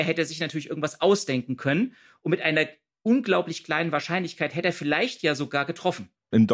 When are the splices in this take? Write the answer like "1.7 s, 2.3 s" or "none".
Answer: none